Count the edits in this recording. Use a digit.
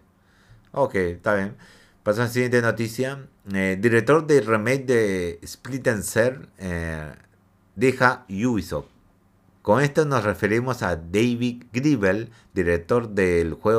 2